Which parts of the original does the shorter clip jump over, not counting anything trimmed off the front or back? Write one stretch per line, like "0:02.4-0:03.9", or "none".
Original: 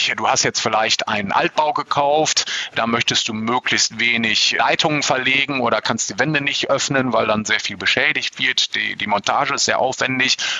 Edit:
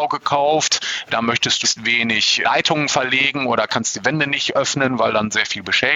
0:03.3-0:03.8